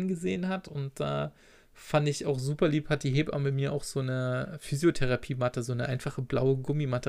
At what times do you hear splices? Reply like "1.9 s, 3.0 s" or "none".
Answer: none